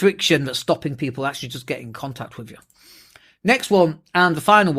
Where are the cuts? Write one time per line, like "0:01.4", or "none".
none